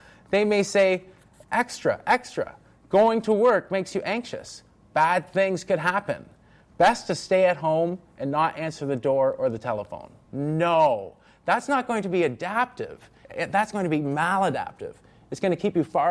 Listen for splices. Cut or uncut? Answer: cut